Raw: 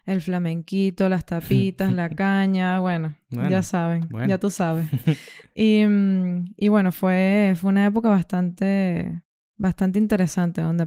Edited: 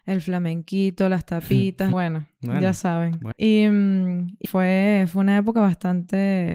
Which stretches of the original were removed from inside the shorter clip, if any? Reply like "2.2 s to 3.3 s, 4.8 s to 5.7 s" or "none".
1.9 s to 2.8 s, 4.2 s to 5.5 s, 6.6 s to 6.9 s